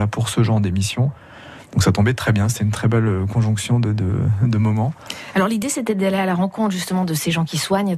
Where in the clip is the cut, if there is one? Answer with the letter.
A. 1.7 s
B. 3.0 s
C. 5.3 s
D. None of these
D